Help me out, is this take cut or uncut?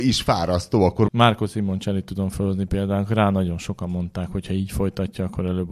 cut